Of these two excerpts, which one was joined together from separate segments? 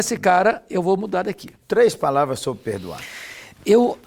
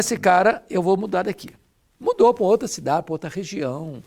first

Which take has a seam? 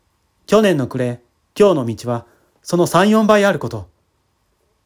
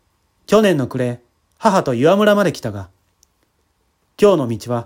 first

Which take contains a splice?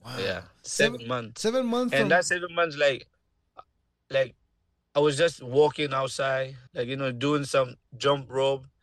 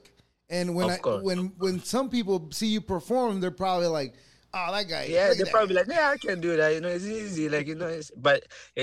first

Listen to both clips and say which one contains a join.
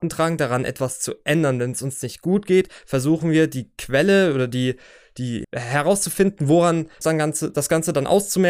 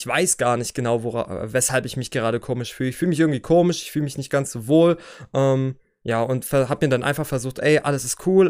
first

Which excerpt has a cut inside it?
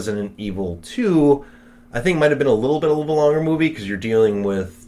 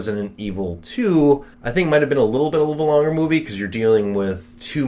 second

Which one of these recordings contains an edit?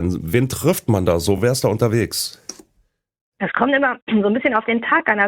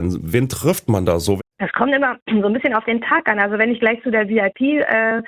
second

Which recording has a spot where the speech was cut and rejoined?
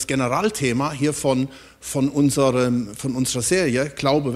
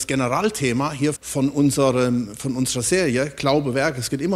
second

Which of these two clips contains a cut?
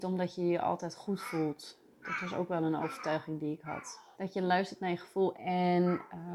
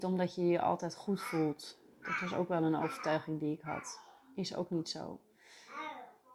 first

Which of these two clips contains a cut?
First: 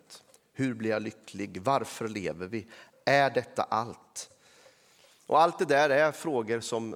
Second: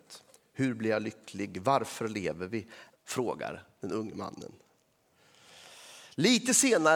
second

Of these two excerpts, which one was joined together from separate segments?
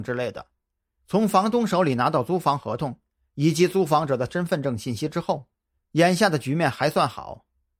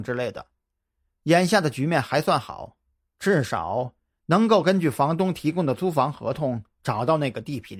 first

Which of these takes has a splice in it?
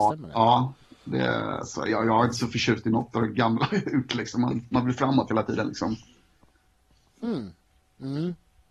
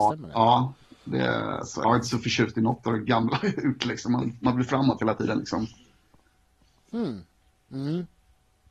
second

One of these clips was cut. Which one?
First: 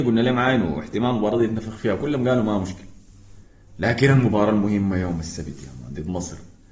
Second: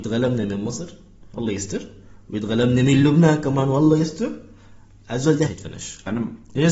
second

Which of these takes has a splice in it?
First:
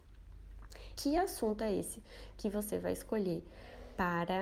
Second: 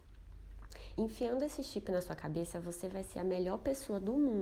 first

